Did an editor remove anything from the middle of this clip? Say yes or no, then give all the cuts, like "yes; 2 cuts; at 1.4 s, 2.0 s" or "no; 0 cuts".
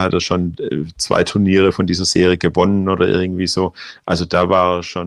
no; 0 cuts